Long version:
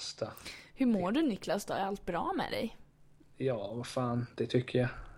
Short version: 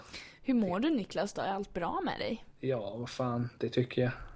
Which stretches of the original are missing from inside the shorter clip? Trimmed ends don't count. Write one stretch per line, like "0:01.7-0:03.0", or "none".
0:02.8-0:03.3